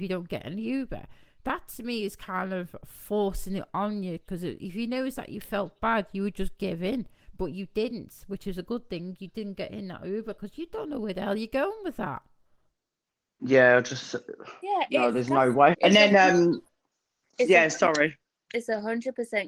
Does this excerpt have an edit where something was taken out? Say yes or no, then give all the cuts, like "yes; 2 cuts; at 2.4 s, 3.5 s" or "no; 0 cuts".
yes; 1 cut; at 15.7 s